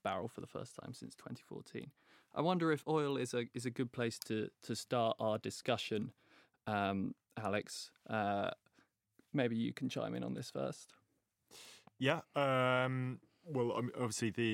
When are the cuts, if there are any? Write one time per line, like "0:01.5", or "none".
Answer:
none